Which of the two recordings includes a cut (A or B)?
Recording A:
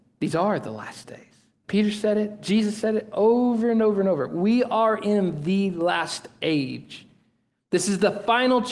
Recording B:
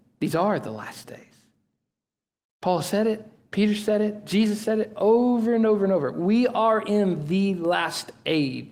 A